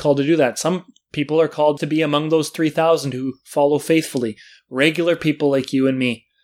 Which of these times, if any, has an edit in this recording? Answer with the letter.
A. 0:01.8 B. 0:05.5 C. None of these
A